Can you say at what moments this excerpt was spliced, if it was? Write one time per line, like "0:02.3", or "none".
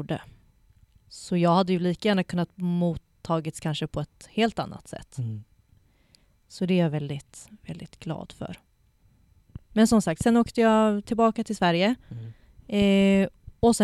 0:01.0